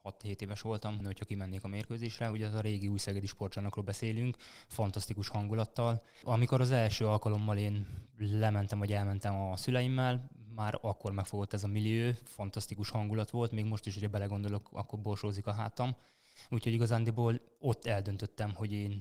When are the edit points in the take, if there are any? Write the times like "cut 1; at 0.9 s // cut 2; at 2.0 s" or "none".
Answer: cut 1; at 1.0 s